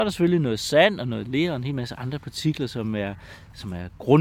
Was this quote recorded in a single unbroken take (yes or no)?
yes